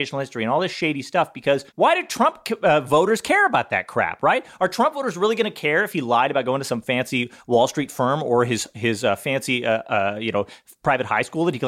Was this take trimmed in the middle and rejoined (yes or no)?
yes